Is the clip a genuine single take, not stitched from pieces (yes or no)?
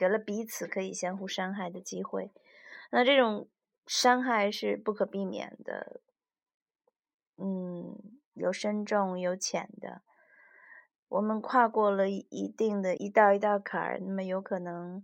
no